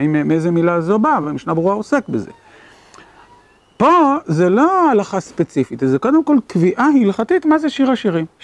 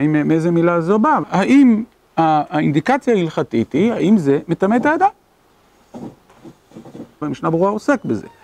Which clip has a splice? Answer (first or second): second